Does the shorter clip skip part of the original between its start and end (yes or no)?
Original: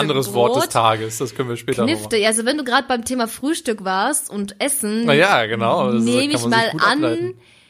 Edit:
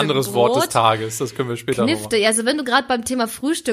no